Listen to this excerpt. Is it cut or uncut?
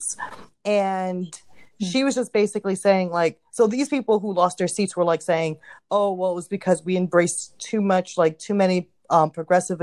uncut